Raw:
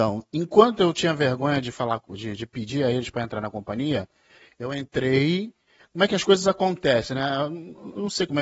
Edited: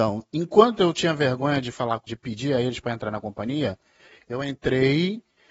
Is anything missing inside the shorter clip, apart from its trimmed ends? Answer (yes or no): yes